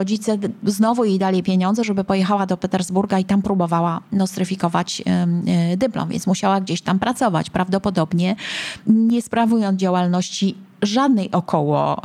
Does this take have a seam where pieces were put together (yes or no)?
no